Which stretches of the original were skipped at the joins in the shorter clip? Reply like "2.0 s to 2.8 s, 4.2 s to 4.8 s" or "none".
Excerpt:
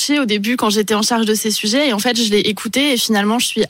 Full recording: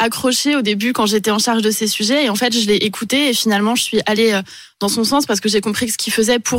none